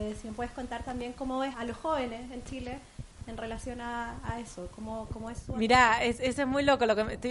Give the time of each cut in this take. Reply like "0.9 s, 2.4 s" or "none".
1.5 s